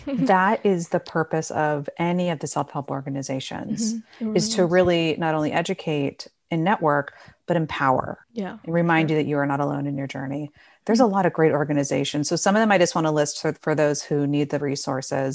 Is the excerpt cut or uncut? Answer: cut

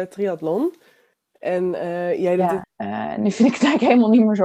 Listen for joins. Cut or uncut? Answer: cut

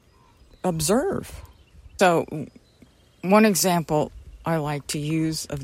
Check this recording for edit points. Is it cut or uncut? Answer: cut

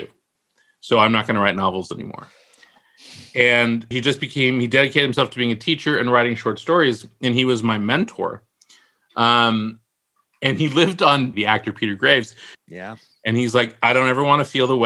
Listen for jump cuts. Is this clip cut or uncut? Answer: cut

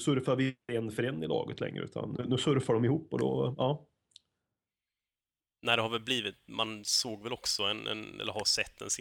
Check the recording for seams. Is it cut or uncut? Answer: uncut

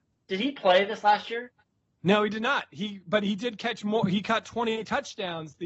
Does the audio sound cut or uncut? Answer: uncut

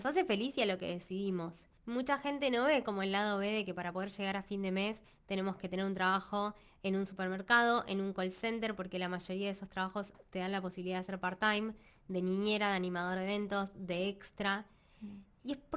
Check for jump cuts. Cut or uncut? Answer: cut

